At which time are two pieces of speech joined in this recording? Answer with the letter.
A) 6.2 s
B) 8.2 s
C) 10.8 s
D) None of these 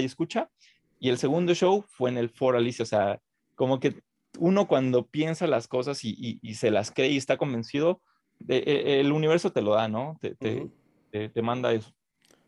D